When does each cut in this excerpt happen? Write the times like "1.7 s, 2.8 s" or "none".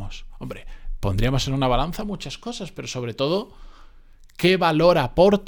none

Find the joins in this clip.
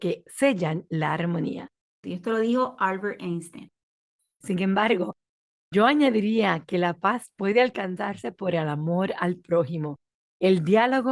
2.0 s, 4.4 s

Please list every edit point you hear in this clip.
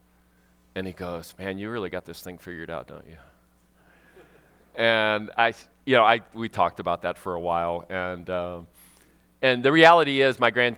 none

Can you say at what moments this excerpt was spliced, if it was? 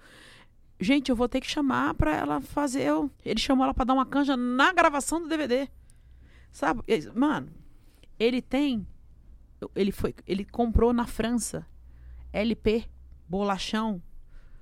3.1 s

